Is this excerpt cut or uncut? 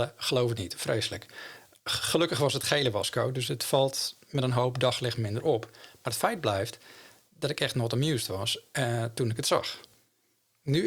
uncut